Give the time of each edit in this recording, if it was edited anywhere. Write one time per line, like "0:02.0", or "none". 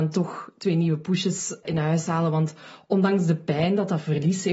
0:01.6